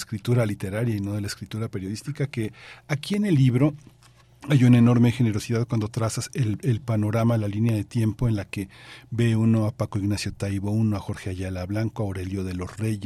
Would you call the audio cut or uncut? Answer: uncut